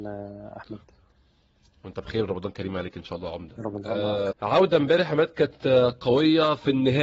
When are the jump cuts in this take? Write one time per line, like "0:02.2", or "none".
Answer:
0:04.3